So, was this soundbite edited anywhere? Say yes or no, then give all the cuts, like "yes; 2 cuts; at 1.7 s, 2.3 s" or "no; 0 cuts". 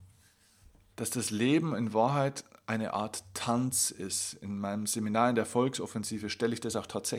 yes; 1 cut; at 0.9 s